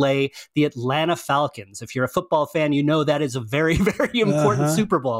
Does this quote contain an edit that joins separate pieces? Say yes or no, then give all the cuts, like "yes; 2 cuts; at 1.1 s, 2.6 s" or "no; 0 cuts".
no; 0 cuts